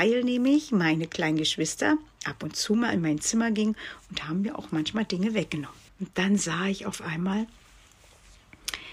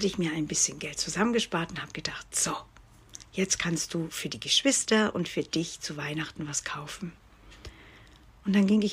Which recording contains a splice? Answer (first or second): first